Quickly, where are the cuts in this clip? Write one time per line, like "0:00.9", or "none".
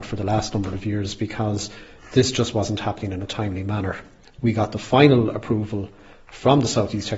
0:04.2